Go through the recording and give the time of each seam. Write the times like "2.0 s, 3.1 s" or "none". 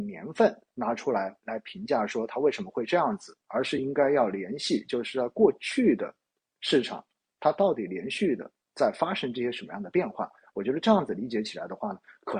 none